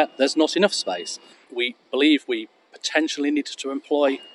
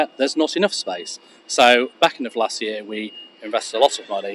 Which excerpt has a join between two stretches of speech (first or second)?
first